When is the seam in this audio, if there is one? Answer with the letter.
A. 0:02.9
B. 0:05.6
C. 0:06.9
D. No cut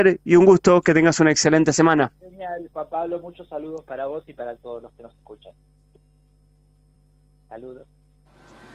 D